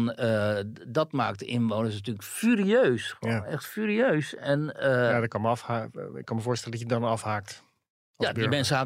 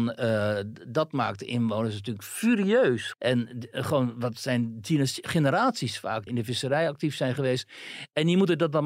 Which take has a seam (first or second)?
second